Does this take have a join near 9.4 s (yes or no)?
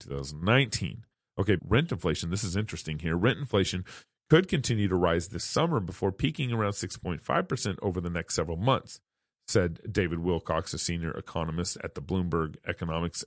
no